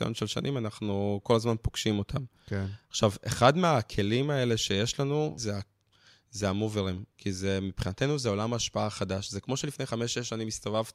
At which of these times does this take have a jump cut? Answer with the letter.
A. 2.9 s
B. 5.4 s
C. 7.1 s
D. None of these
B